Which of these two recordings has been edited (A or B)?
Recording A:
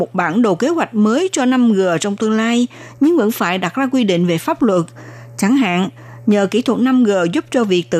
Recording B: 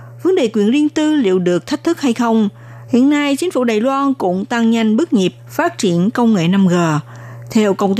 B